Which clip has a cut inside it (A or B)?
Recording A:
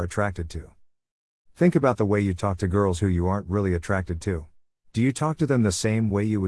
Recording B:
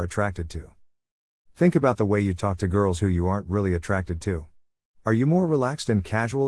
A